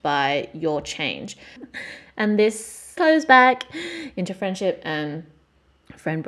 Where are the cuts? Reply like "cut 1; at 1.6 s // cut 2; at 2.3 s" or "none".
cut 1; at 1.6 s // cut 2; at 3.0 s